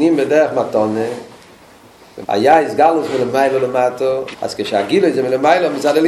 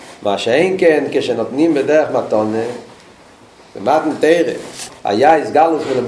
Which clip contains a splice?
first; 2 cuts; at 2.2 s, 4.3 s

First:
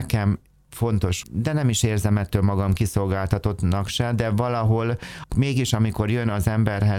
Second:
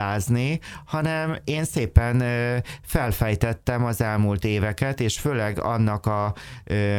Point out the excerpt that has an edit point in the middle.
first; 1 cut; at 1.2 s

